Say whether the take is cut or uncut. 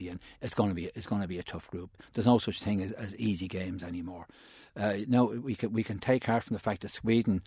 uncut